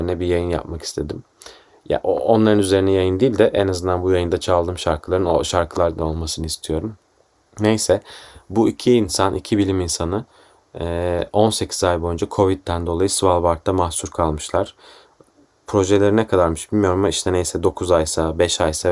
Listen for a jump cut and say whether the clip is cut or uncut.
uncut